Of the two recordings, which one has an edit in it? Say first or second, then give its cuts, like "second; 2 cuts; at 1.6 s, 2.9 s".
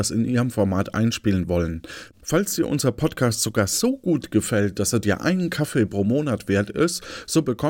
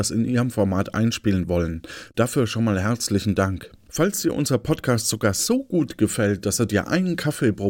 first; 1 cut; at 2.1 s